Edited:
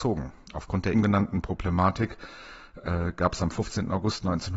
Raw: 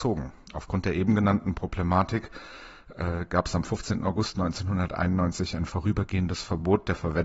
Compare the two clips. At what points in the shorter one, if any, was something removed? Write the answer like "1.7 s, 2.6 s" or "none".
0.9 s